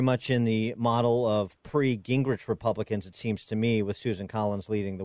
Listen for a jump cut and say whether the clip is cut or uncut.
uncut